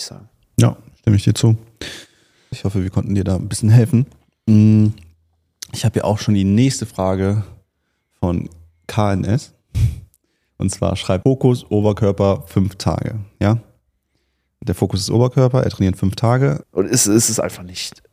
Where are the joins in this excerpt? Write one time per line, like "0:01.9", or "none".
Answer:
0:02.5
0:11.2
0:16.6